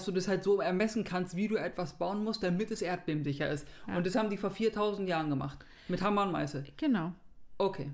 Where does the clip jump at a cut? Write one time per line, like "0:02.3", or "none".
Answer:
none

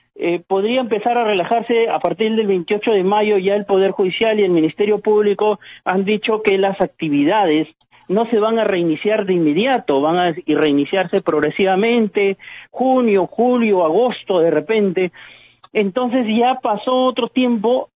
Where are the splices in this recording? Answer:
none

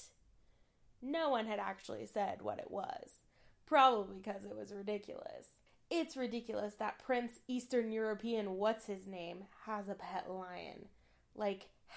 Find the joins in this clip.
none

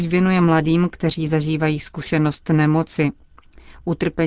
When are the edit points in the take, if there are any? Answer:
none

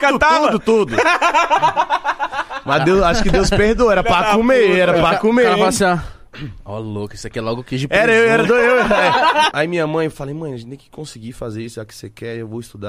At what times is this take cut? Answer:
0:09.5

